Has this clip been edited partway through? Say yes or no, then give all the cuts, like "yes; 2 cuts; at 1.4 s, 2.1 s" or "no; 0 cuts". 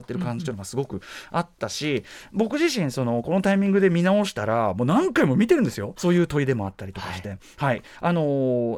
yes; 1 cut; at 6.0 s